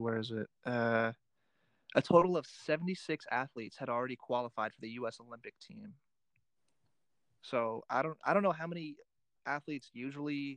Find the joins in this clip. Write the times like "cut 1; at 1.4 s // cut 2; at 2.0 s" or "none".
none